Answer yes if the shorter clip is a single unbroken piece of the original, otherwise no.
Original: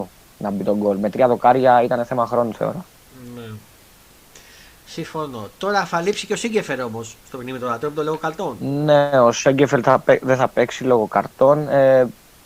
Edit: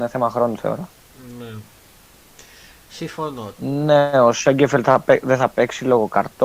no